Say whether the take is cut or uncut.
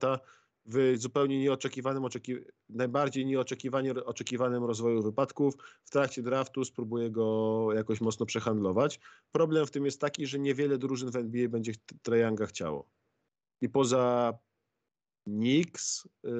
uncut